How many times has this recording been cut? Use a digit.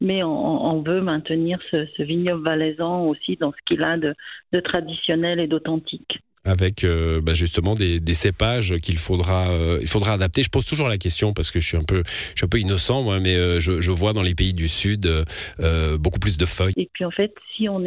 1